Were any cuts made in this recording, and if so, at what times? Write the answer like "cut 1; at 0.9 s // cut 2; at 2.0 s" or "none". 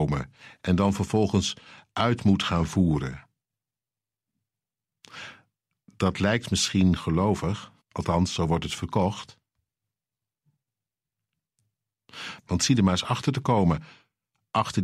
cut 1; at 7.8 s // cut 2; at 12.4 s